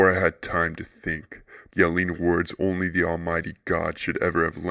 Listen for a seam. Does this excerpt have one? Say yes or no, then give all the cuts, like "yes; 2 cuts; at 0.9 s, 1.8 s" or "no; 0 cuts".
yes; 1 cut; at 1.7 s